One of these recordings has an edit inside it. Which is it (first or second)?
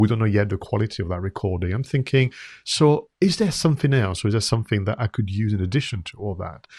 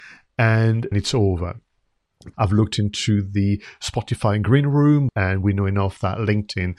second